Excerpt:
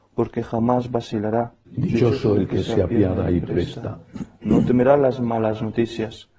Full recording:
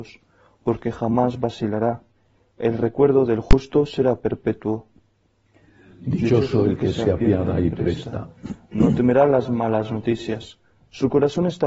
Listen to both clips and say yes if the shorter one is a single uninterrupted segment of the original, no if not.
no